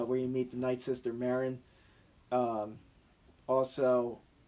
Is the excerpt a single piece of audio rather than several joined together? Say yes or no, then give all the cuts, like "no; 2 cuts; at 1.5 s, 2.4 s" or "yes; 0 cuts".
yes; 0 cuts